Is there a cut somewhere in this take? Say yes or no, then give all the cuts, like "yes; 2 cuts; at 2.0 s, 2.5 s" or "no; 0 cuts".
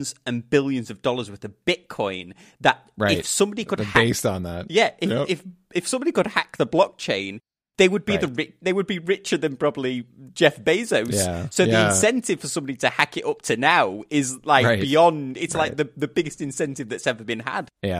no; 0 cuts